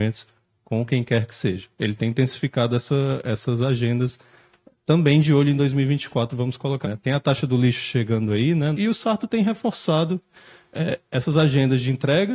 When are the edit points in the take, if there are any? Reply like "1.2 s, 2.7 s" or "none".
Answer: 6.8 s, 8.7 s